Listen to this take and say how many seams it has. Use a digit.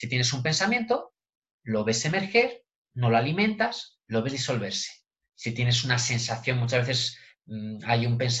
0